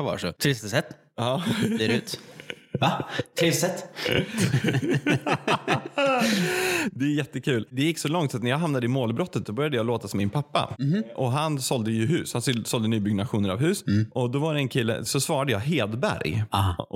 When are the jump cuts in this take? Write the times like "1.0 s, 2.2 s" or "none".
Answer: 15.1 s